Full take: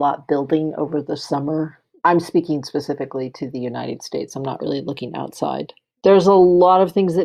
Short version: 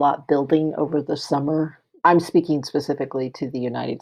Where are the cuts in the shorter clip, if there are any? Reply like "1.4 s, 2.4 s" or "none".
none